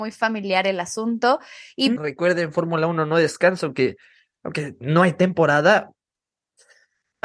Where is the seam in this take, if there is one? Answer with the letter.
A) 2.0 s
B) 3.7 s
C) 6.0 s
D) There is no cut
A